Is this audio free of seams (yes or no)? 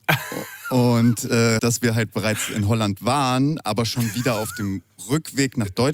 no